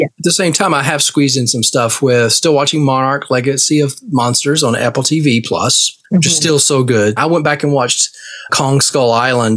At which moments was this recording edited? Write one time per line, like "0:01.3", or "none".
0:06.0
0:07.2
0:08.5